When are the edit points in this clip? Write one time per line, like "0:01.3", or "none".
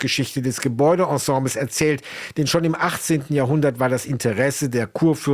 none